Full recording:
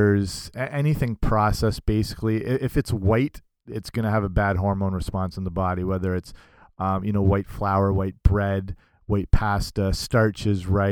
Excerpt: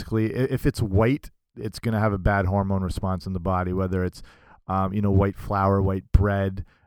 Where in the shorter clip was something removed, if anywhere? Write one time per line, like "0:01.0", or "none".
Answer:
none